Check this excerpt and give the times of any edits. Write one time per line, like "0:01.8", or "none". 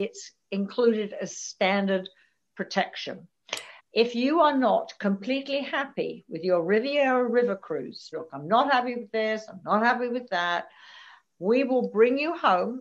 0:03.8
0:08.1